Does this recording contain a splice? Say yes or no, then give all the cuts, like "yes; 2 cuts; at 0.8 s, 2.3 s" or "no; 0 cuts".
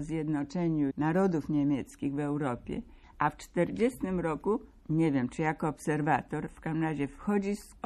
no; 0 cuts